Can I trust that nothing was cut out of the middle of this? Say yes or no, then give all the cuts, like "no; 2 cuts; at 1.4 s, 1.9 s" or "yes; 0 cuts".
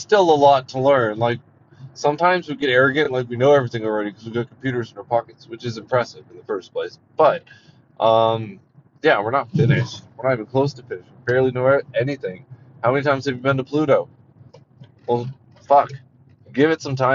yes; 0 cuts